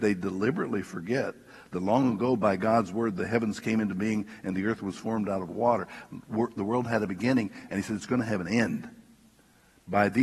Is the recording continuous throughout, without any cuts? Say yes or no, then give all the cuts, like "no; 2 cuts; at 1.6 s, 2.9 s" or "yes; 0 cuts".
yes; 0 cuts